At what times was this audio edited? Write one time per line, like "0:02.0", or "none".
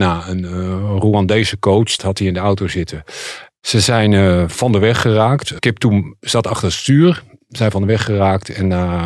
0:02.0
0:03.6